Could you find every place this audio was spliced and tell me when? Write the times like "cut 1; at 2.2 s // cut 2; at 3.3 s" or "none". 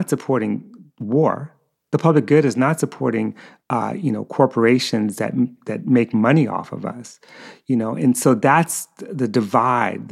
none

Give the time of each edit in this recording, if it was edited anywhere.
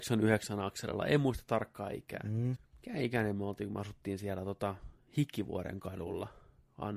cut 1; at 2.6 s

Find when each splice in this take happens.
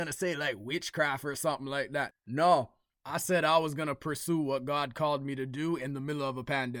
cut 1; at 2.1 s

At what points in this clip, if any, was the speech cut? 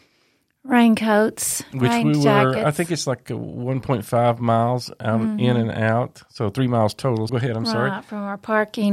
cut 1; at 7.3 s

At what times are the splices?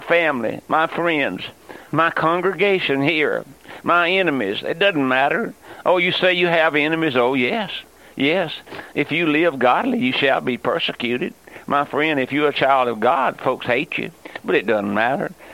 none

